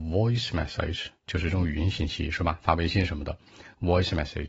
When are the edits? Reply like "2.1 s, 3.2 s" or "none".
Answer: none